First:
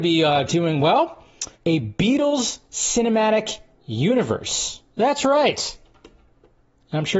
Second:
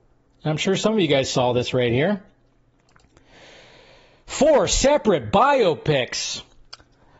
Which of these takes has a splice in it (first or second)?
first